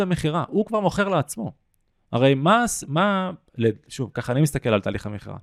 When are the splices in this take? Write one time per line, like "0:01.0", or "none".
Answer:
none